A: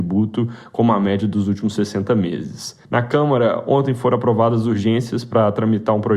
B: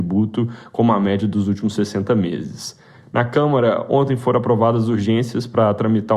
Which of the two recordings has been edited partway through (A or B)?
A